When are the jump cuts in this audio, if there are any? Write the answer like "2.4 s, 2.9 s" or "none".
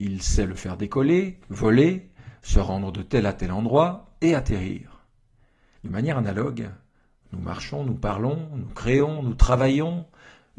5.8 s